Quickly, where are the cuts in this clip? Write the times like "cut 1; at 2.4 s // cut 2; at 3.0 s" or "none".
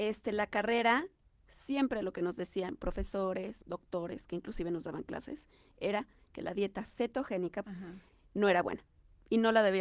cut 1; at 1.4 s // cut 2; at 3.6 s // cut 3; at 7.6 s